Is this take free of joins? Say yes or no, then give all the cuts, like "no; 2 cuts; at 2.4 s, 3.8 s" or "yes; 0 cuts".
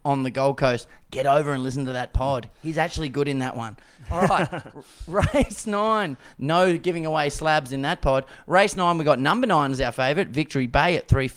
yes; 0 cuts